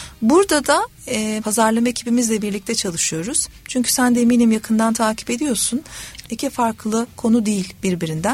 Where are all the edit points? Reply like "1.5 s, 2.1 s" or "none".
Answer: 1.4 s, 6.2 s

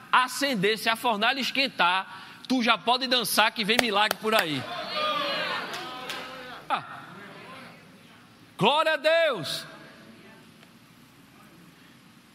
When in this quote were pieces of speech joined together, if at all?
6.7 s

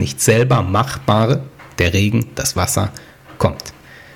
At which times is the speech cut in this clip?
none

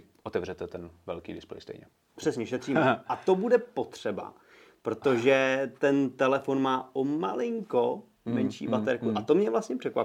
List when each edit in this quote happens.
2.2 s

